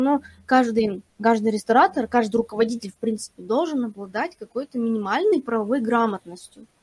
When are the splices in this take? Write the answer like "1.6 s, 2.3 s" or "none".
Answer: 1.1 s